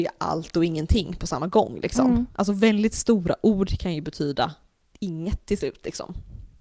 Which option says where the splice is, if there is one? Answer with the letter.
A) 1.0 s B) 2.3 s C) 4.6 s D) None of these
D